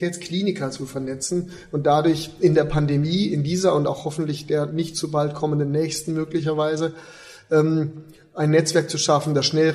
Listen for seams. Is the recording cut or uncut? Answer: uncut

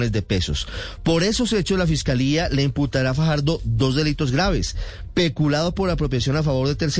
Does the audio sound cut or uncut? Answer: uncut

